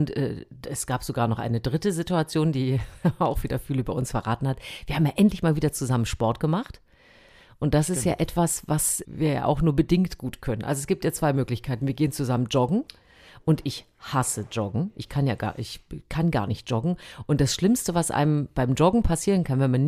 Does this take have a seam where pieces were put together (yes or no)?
yes